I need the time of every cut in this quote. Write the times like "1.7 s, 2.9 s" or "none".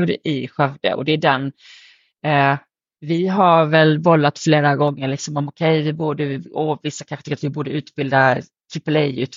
none